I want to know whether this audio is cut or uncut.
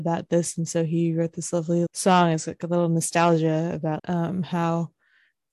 cut